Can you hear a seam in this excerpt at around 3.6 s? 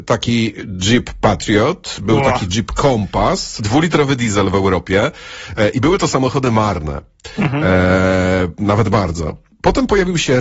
yes; 1 cut; at 3.6 s

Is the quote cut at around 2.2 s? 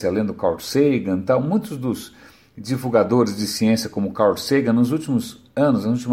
no; 0 cuts

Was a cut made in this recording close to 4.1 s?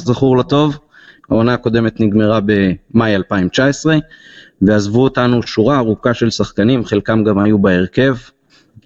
no; 1 cut; at 1.2 s

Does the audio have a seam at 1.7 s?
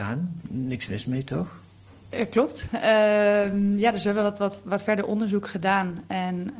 no; 0 cuts

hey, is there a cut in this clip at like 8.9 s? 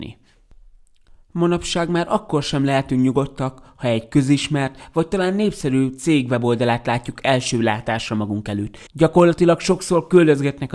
yes; 1 cut; at 8.9 s

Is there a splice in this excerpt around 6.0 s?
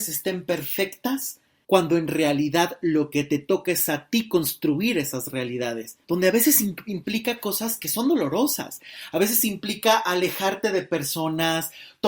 yes; 2 cuts; at 1.6 s, 6.0 s

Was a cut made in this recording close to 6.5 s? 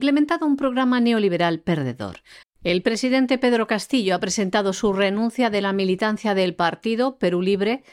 no; 1 cut; at 2.4 s

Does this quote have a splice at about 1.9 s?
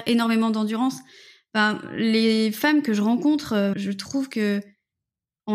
no; 1 cut; at 3.7 s

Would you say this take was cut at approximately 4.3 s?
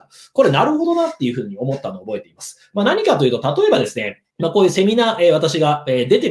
yes; 1 cut; at 4.3 s

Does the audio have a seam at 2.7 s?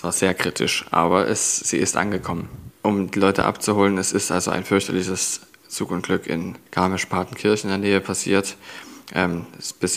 yes; 2 cuts; at 2.7 s, 6.7 s

